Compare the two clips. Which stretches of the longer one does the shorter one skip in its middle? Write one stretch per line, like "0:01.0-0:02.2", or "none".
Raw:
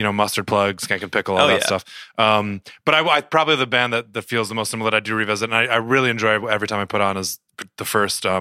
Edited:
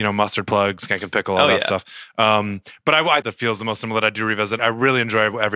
0:03.2-0:04.1
0:05.5-0:05.7